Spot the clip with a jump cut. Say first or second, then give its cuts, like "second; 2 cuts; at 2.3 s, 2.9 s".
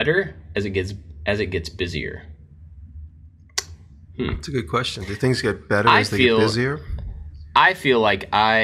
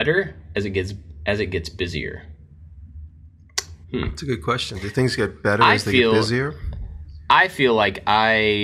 second; 1 cut; at 3.8 s